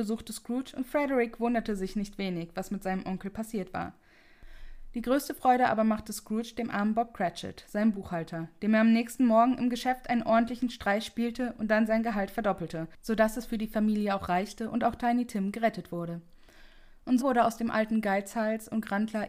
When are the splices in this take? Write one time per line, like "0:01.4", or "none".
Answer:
0:17.2